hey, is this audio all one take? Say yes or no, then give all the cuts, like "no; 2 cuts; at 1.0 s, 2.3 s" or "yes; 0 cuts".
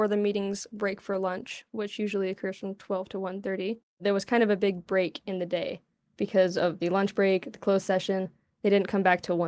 yes; 0 cuts